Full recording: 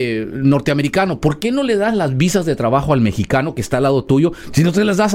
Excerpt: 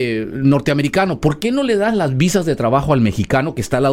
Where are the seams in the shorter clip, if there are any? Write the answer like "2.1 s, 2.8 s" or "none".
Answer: none